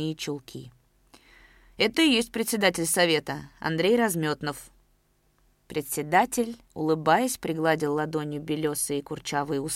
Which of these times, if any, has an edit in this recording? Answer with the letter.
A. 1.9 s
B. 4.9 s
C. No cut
A